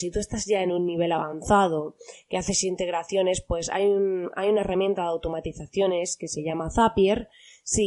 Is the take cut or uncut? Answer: uncut